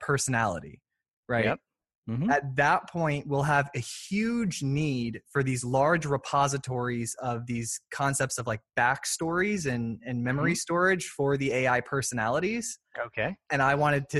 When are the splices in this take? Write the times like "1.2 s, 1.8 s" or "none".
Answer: none

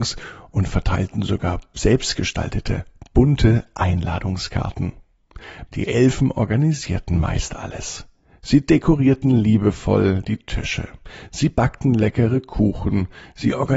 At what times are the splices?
5.7 s

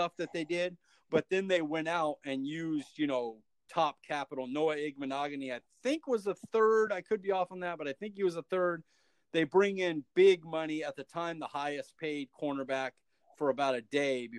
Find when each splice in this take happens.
none

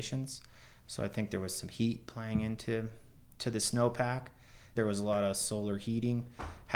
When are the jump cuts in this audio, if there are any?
4.8 s

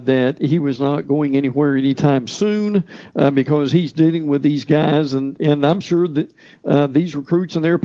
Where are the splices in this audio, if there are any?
none

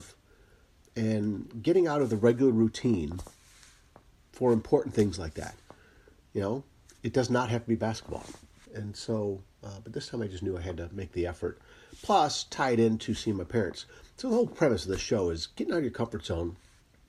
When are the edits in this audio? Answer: 8.7 s

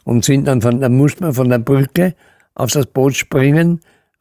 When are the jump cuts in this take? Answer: none

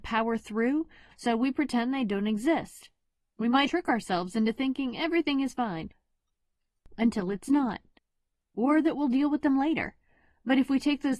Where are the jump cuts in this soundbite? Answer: 1.1 s, 3.7 s

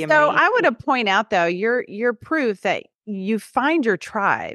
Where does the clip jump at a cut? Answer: none

